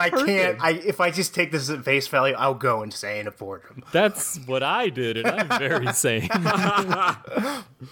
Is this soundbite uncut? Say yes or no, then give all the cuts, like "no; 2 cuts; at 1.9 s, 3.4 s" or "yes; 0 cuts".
yes; 0 cuts